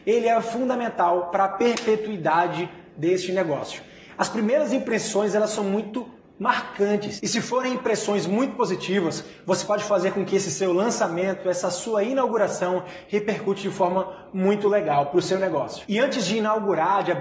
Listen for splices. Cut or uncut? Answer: uncut